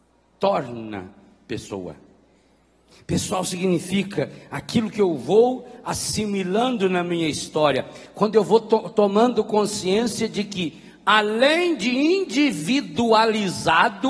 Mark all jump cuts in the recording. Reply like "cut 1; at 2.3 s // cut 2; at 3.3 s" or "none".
none